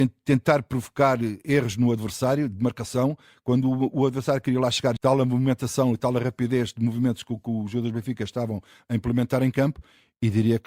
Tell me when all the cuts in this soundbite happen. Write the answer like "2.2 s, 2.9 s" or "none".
5.0 s